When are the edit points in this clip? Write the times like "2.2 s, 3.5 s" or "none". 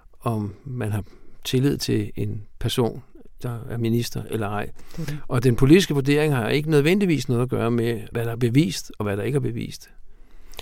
3.4 s